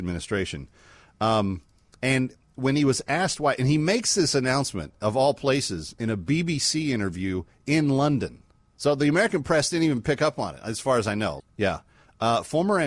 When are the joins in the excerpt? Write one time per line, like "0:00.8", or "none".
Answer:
0:08.7
0:11.4